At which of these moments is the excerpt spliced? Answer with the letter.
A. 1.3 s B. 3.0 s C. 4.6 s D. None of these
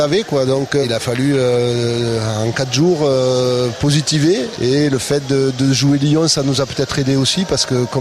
D